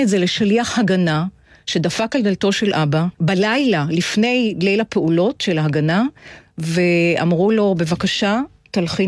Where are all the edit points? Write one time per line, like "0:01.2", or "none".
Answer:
0:03.1